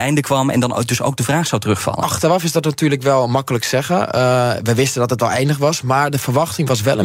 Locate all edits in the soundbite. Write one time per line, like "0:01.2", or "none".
none